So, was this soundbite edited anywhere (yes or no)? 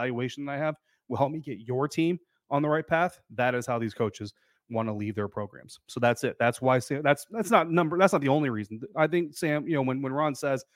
no